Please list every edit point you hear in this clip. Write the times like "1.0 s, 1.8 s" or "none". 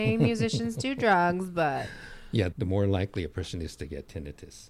2.5 s